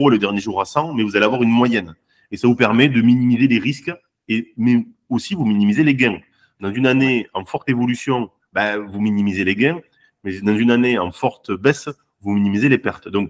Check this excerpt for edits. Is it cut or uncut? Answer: uncut